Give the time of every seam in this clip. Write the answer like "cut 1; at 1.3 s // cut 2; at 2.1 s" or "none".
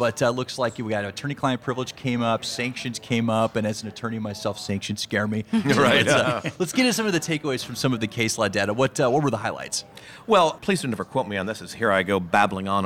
none